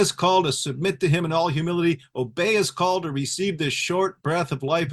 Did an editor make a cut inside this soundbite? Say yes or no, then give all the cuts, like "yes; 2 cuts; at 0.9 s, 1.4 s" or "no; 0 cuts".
no; 0 cuts